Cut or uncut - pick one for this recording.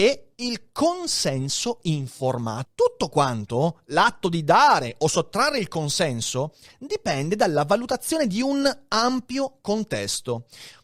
cut